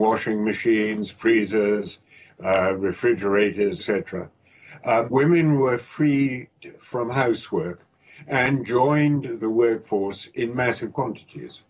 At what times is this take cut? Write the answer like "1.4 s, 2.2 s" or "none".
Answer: 3.8 s, 5.1 s